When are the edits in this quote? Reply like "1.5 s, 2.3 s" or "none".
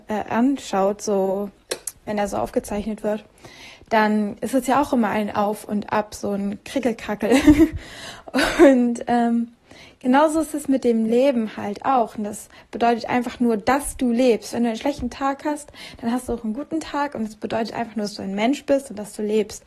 none